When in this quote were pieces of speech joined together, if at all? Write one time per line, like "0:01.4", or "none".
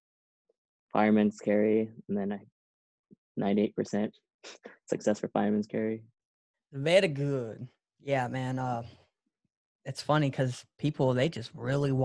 0:06.5